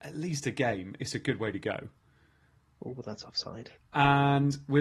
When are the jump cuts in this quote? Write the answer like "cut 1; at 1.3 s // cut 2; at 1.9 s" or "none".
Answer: cut 1; at 3.8 s